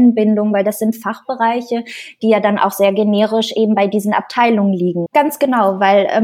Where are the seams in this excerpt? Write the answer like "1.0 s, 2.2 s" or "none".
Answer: 5.1 s